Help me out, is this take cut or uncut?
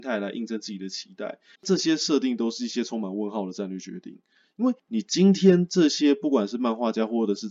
cut